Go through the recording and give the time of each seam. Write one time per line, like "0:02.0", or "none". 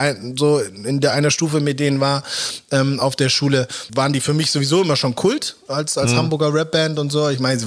0:03.9